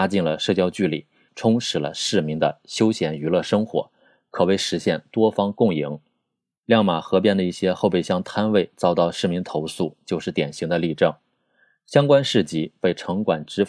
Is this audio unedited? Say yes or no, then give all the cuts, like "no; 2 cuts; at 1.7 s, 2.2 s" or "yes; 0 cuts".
no; 2 cuts; at 1.3 s, 6.6 s